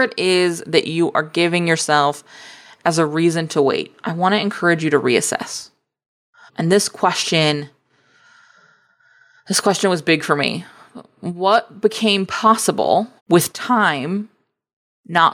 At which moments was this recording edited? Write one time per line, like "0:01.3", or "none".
0:06.5
0:13.2